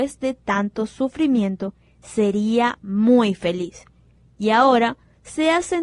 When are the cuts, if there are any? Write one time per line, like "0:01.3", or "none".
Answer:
none